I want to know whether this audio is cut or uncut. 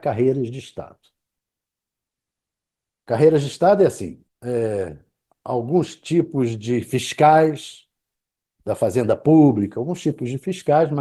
cut